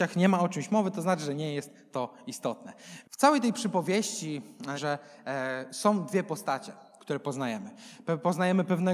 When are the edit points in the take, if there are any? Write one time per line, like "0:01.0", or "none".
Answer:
0:03.0
0:04.8